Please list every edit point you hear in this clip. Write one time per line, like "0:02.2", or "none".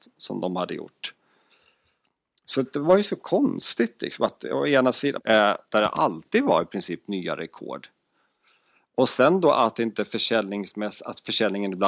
0:05.2